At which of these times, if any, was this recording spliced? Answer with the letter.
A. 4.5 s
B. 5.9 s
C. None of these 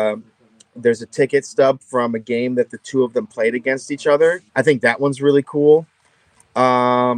A